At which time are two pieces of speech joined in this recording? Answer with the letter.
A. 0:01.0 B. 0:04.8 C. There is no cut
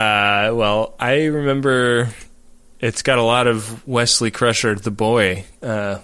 C